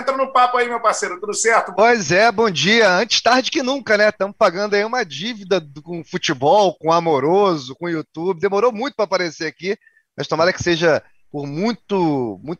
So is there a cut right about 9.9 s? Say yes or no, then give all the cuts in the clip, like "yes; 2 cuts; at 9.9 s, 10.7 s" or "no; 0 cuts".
no; 2 cuts; at 1.7 s, 7.7 s